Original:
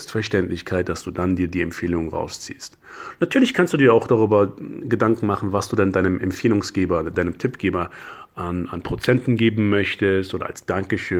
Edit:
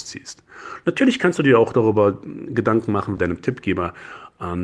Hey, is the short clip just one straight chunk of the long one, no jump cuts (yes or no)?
no